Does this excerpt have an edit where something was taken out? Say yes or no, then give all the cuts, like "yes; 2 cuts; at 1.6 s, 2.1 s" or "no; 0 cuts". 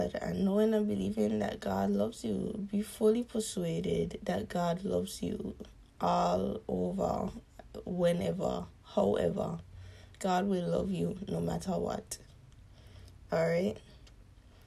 no; 0 cuts